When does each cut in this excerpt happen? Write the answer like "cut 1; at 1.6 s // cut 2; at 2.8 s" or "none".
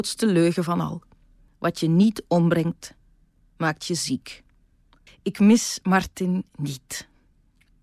cut 1; at 1.5 s // cut 2; at 5.1 s